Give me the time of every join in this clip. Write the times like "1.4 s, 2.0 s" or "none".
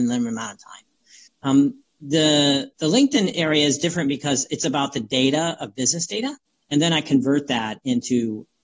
1.3 s, 2.7 s, 6.6 s